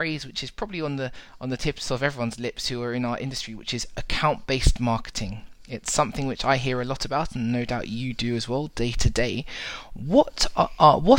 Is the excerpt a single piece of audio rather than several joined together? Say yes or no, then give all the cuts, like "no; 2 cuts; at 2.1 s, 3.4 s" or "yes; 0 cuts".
yes; 0 cuts